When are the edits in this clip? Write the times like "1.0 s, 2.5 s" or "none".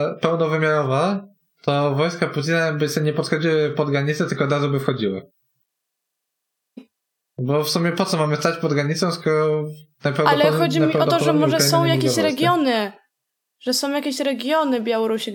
6.8 s